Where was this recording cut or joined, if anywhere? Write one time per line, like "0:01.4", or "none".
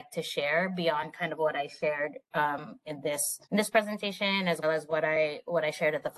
0:03.4
0:04.6